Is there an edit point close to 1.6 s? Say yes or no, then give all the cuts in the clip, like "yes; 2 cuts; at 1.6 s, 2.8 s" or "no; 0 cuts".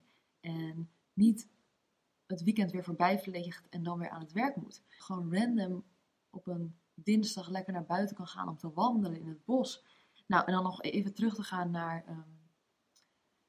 no; 2 cuts; at 5.0 s, 10.2 s